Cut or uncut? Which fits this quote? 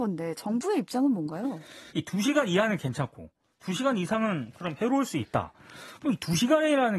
cut